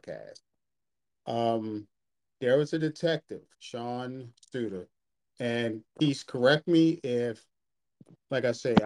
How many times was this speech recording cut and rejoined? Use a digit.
1